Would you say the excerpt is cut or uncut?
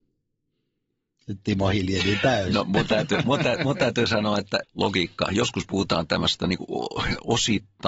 cut